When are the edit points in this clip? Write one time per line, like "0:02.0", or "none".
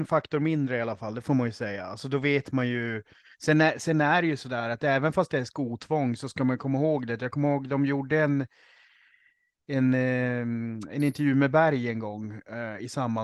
none